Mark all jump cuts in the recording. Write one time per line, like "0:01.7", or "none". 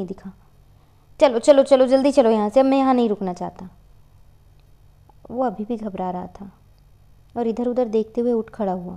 none